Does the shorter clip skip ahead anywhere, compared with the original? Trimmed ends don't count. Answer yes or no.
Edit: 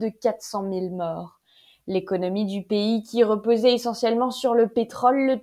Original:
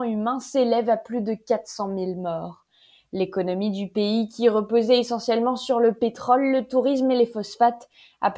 no